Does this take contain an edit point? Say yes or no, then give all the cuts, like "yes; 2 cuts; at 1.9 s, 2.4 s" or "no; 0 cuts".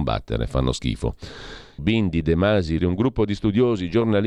yes; 2 cuts; at 1.8 s, 2.8 s